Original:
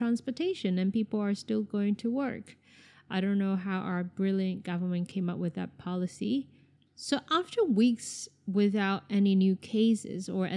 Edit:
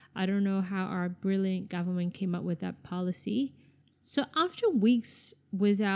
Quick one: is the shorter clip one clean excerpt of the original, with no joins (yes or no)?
yes